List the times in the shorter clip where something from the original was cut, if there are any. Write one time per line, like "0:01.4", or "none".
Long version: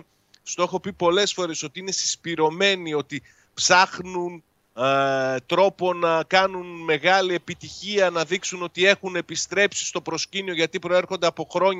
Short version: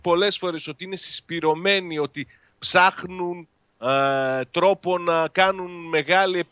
none